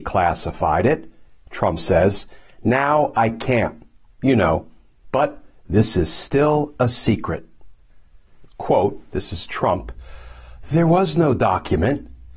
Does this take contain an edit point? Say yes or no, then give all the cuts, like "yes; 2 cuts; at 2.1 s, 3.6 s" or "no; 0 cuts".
yes; 1 cut; at 8.5 s